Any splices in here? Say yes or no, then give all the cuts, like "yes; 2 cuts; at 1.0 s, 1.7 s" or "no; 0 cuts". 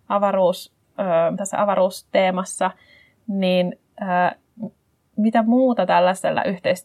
yes; 1 cut; at 1.4 s